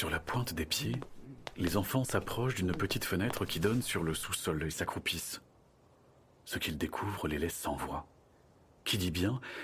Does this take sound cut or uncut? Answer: uncut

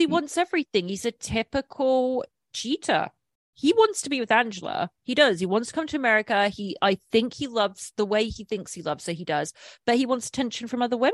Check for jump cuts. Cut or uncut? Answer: uncut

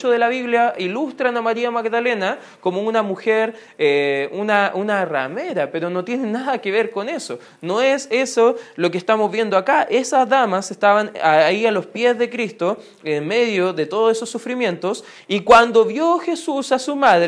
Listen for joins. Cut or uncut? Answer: uncut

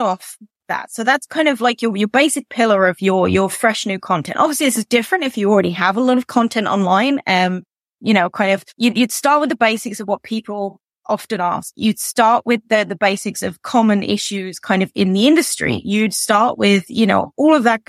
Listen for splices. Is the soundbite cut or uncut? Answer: cut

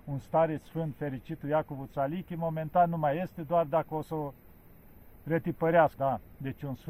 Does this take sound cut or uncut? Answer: cut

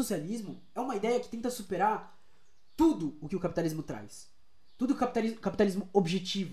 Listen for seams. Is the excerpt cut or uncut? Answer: uncut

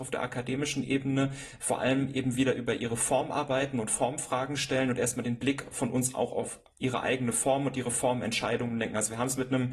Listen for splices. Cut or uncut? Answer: uncut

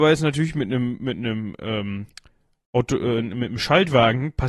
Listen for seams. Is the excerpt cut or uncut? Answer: uncut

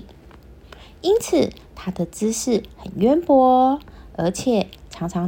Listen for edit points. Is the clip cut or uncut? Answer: uncut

